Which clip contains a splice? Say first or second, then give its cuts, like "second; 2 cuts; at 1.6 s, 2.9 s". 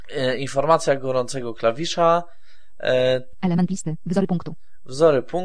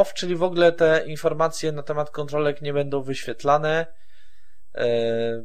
first; 1 cut; at 3.3 s